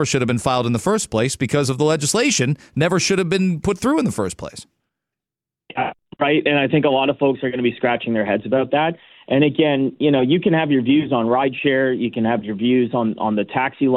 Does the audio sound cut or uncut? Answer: uncut